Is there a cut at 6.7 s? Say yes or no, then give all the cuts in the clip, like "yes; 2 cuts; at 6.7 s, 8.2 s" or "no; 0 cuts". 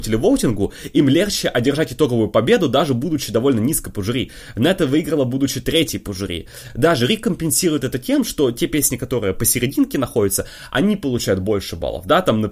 yes; 1 cut; at 6.7 s